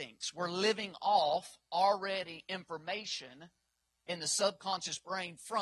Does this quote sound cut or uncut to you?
uncut